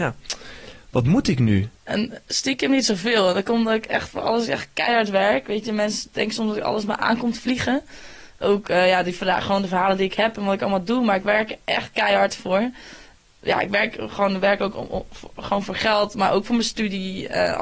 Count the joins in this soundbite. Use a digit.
1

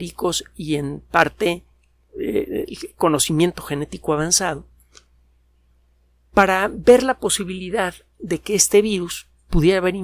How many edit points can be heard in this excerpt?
0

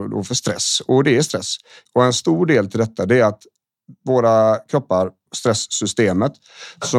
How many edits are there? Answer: 2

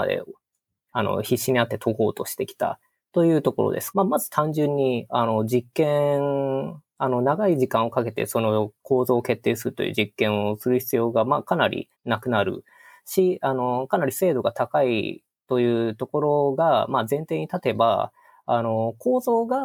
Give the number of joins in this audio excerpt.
2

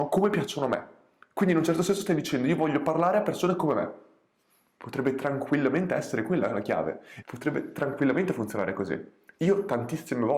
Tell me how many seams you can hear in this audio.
1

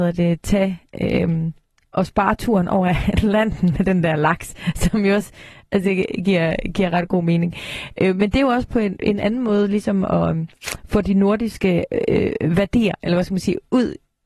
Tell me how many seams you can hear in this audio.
0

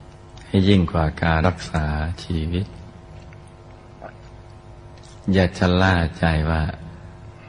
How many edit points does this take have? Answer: 1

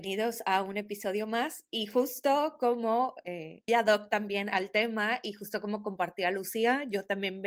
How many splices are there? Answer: 1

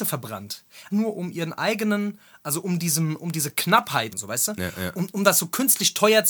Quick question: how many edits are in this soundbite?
2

